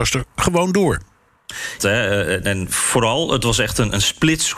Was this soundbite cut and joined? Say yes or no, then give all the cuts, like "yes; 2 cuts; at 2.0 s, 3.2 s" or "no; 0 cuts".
yes; 1 cut; at 1.8 s